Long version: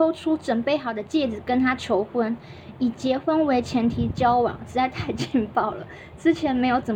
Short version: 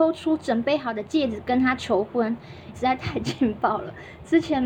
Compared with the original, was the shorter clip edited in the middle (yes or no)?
yes